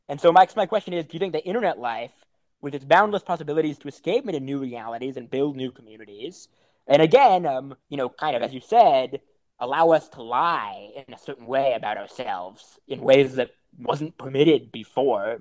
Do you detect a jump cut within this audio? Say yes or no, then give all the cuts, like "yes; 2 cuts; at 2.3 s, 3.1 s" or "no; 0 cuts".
yes; 1 cut; at 7.8 s